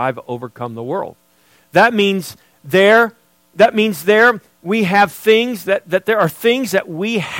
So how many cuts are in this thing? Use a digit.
0